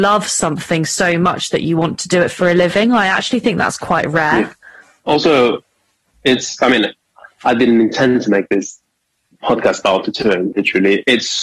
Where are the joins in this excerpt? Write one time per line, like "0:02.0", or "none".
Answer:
0:10.5